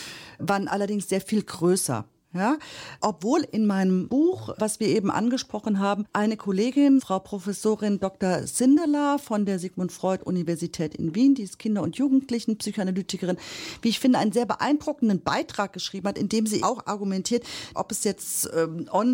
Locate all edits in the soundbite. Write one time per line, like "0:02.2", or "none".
0:16.6
0:17.7